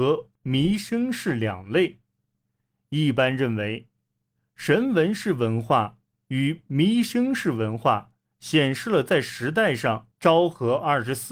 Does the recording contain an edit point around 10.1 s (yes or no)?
yes